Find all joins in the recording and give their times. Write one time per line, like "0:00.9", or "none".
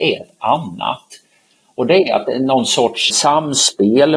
0:03.1